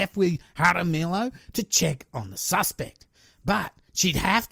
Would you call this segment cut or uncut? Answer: uncut